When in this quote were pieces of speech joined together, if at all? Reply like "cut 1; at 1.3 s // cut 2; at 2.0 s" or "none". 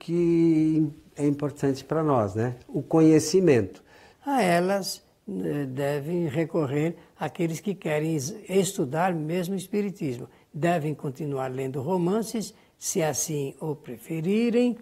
cut 1; at 4.1 s